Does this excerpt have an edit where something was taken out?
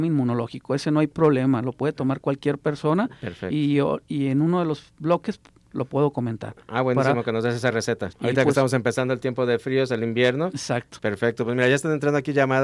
yes; 2 cuts; at 8.1 s, 11.0 s

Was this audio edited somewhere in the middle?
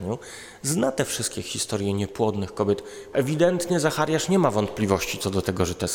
yes; 1 cut; at 3.1 s

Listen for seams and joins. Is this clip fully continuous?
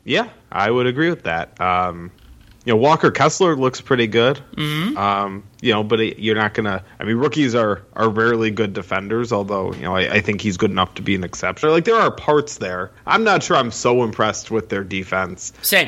no; 1 cut; at 11.6 s

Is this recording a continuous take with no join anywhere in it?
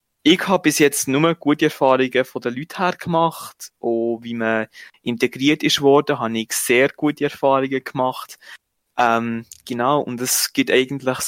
yes; 0 cuts

